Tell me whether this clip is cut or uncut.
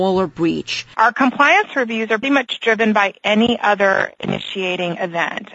cut